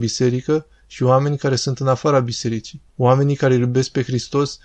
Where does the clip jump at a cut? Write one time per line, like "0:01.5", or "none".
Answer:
0:02.9